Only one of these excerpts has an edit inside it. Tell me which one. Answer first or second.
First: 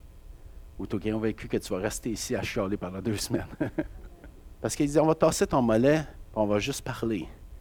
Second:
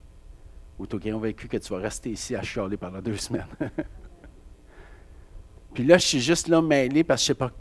first